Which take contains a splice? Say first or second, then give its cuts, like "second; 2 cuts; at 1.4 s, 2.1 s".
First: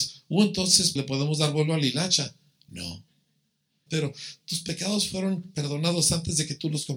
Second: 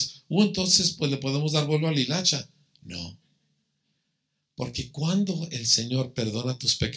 first; 2 cuts; at 1.0 s, 3.9 s